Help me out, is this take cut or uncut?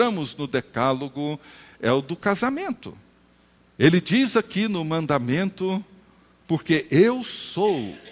cut